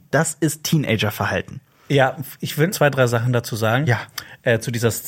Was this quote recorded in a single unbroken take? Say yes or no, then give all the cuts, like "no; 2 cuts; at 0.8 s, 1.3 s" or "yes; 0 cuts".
no; 1 cut; at 2.7 s